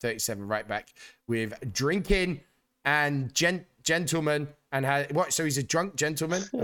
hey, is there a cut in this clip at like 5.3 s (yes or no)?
no